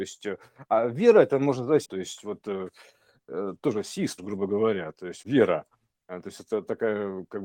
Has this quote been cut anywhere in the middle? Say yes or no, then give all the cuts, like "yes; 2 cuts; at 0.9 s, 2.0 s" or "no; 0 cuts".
yes; 3 cuts; at 1.8 s, 4.2 s, 5.2 s